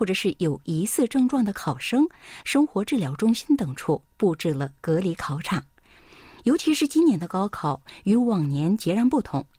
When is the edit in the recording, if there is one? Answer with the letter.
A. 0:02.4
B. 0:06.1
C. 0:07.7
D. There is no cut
A